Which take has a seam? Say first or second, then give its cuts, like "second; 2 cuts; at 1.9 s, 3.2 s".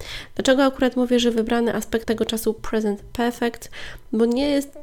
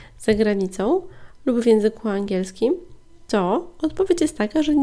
first; 1 cut; at 2.0 s